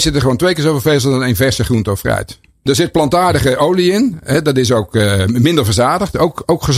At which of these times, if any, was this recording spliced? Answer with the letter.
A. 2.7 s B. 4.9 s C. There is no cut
A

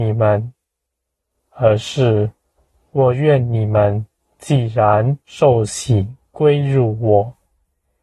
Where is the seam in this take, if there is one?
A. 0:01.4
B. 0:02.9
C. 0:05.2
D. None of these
C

